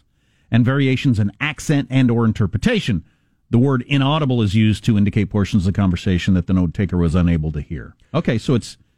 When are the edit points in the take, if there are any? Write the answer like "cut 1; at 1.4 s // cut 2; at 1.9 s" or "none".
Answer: none